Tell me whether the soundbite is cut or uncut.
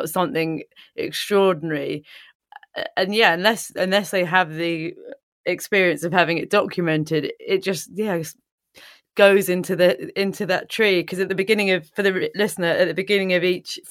cut